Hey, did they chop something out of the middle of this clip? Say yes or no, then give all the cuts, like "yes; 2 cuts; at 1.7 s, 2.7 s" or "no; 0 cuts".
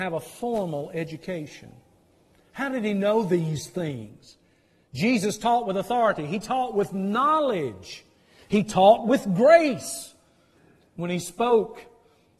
no; 0 cuts